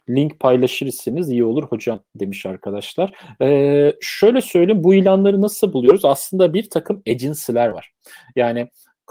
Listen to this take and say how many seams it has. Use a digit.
0